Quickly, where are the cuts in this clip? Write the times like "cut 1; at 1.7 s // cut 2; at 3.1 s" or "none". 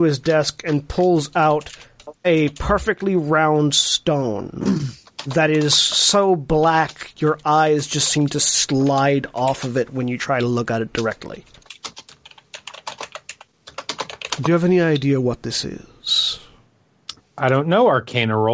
none